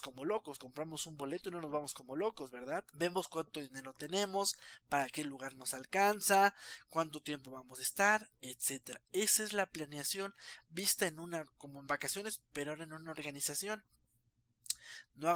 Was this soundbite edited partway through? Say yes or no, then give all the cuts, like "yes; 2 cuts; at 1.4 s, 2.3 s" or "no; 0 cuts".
yes; 2 cuts; at 2.9 s, 11.6 s